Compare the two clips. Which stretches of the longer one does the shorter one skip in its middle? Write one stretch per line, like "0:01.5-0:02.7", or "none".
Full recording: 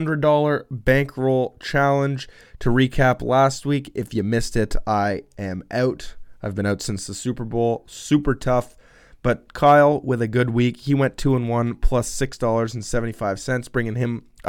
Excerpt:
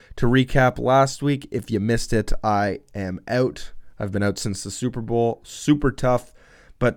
none